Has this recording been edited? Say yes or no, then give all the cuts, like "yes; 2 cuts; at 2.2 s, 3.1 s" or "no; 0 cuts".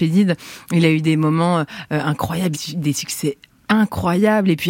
yes; 1 cut; at 2.5 s